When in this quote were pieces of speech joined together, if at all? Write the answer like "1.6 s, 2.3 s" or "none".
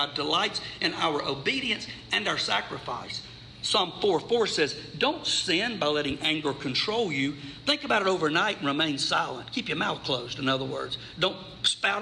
none